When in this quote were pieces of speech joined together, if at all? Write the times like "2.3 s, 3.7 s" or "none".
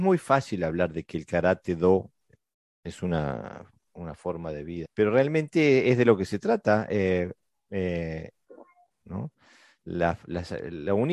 4.8 s, 8.9 s

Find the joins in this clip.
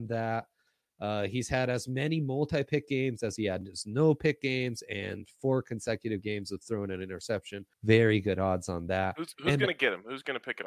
7.7 s

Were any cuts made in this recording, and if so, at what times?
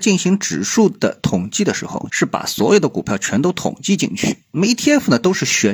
2.1 s, 4.5 s

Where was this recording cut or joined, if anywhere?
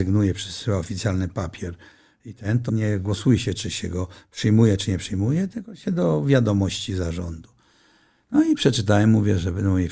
2.7 s

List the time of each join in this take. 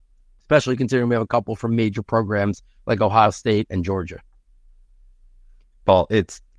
none

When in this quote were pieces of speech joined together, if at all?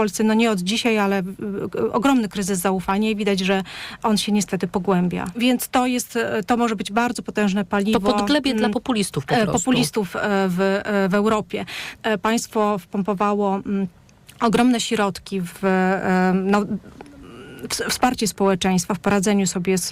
5.3 s, 12.0 s, 15.5 s

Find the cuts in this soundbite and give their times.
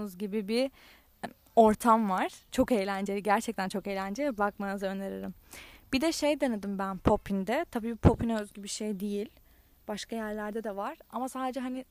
1.2 s

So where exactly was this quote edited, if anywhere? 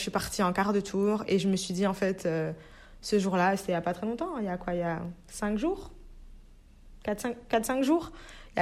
none

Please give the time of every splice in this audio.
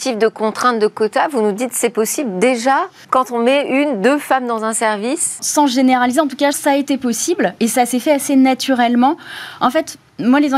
3.0 s, 5.4 s, 6.5 s

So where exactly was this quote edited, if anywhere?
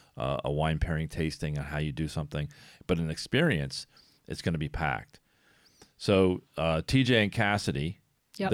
none

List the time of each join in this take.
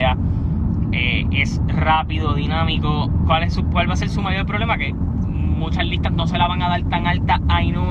none

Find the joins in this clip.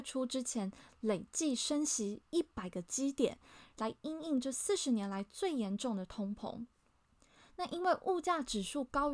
3.7 s

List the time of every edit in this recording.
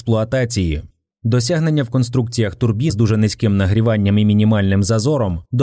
1.1 s, 2.9 s

